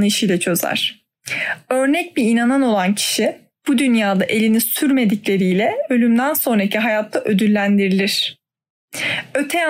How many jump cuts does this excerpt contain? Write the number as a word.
zero